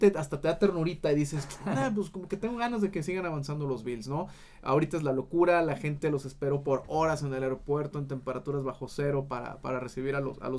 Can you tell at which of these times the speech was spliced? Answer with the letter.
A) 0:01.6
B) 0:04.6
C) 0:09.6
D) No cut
D